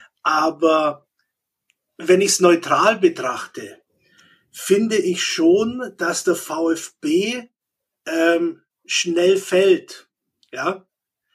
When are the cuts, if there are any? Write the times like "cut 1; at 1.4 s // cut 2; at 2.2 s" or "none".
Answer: none